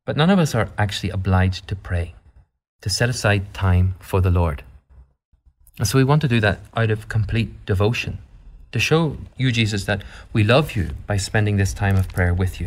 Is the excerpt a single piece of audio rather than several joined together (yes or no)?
yes